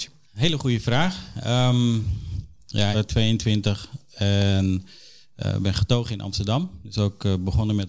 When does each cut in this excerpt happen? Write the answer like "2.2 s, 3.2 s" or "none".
2.9 s